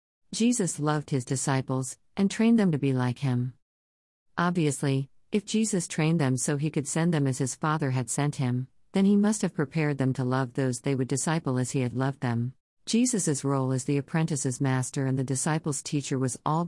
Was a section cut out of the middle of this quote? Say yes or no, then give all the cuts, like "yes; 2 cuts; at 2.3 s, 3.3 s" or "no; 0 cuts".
yes; 1 cut; at 12.7 s